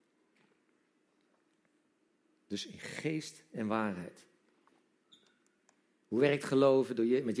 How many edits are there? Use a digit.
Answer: 0